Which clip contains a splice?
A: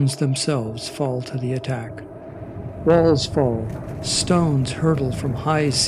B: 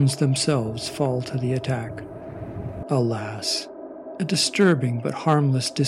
B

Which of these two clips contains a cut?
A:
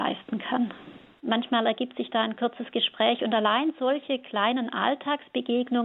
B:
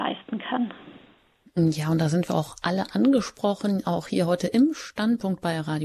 A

